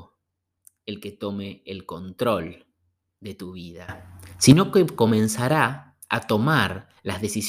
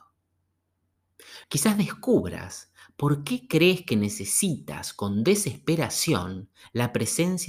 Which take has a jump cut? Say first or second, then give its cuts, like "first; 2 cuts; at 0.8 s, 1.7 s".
second; 1 cut; at 1.4 s